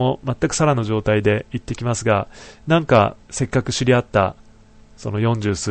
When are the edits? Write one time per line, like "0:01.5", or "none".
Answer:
0:03.2